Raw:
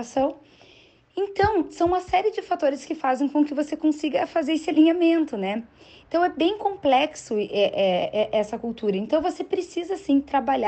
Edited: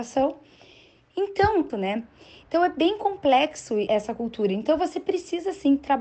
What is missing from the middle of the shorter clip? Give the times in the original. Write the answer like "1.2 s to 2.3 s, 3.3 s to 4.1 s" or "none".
1.7 s to 5.3 s, 7.5 s to 8.3 s